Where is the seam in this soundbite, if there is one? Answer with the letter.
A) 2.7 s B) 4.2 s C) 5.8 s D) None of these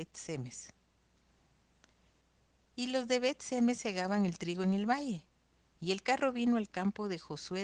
C